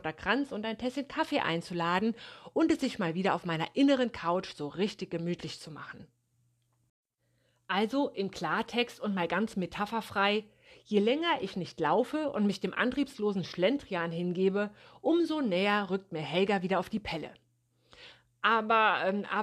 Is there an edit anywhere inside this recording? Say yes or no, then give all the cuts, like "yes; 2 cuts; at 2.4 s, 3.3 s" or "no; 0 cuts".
no; 0 cuts